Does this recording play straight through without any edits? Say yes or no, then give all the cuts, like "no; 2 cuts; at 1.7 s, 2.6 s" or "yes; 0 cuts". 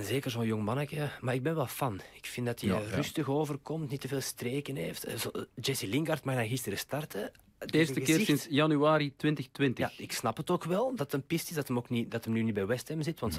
yes; 0 cuts